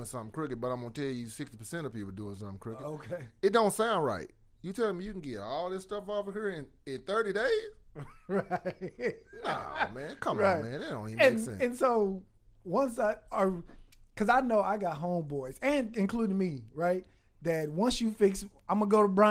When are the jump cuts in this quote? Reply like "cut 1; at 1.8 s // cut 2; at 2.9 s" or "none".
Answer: none